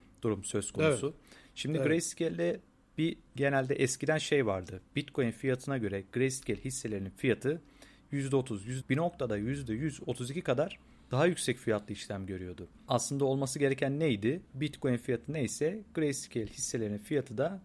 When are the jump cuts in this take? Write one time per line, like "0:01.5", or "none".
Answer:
0:08.8
0:14.5